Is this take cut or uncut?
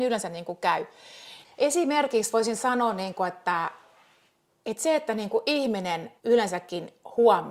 cut